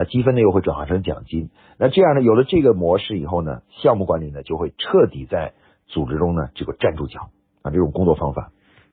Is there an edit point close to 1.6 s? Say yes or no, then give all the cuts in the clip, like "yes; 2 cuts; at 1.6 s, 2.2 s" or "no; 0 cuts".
no; 0 cuts